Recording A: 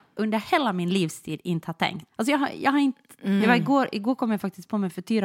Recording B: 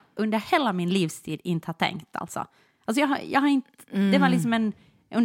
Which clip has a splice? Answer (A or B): A